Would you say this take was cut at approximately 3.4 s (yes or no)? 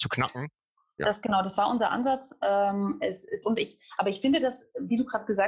yes